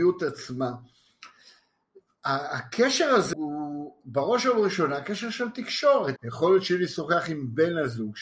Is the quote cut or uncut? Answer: cut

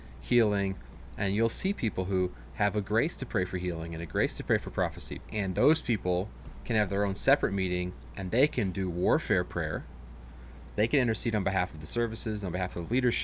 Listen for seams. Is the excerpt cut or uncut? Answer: cut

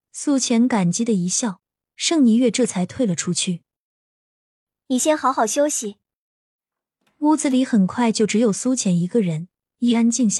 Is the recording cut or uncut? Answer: uncut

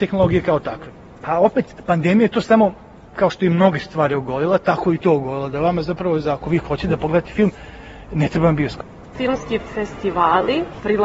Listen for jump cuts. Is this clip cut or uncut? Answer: uncut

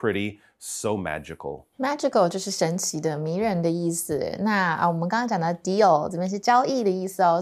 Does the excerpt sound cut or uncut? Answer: cut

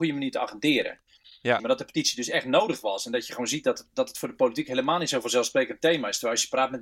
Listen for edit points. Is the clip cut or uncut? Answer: cut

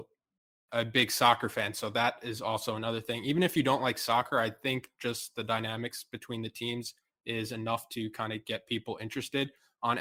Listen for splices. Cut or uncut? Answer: uncut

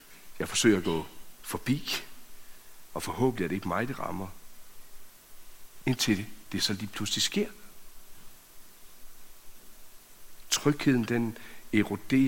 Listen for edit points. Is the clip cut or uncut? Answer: uncut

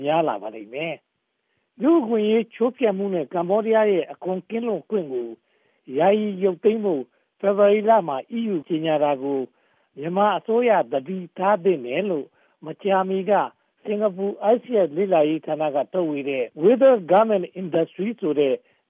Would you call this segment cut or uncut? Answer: cut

